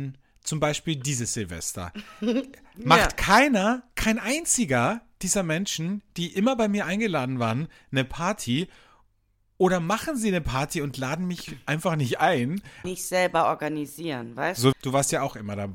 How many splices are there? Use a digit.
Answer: 2